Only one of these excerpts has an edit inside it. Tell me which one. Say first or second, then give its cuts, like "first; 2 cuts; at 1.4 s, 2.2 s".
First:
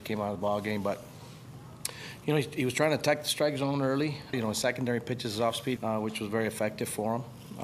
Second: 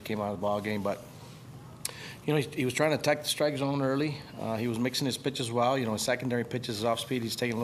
first; 2 cuts; at 4.3 s, 5.8 s